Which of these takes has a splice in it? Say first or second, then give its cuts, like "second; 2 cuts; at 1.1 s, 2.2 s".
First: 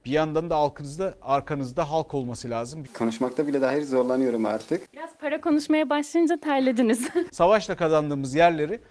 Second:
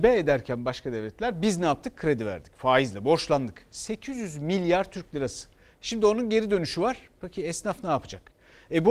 first; 2 cuts; at 2.9 s, 7.3 s